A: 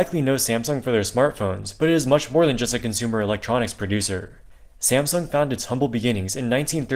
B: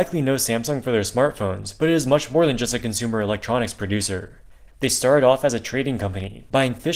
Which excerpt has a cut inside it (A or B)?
B